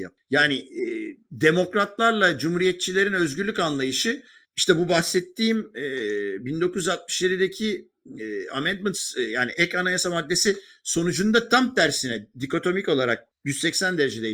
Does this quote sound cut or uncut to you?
cut